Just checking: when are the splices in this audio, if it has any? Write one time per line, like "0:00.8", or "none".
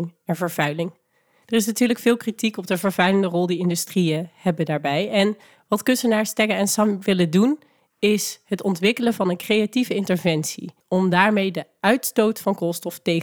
0:10.8

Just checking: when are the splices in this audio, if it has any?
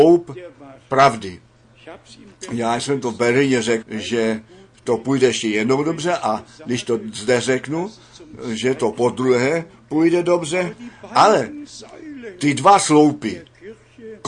0:03.8

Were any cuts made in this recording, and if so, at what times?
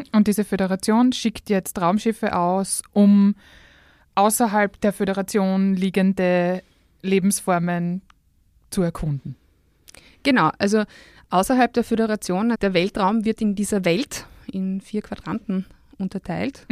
0:12.5

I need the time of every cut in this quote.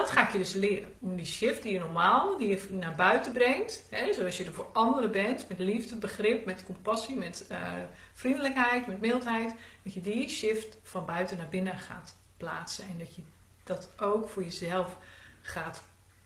none

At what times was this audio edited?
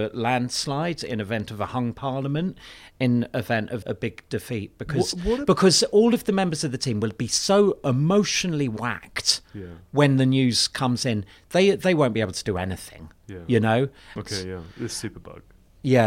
0:03.8
0:14.2

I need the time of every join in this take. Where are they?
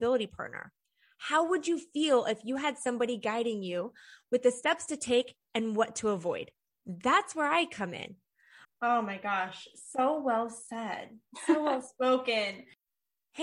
0:08.6

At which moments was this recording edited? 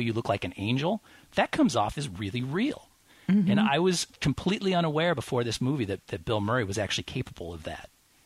none

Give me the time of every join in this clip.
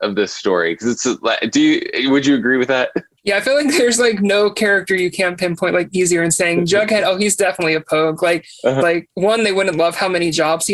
0:08.8

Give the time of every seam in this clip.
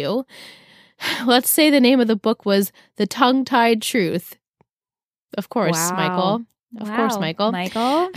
none

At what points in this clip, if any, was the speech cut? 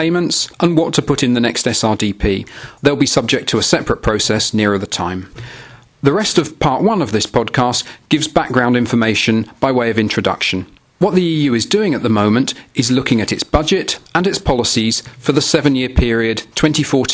0:02.8

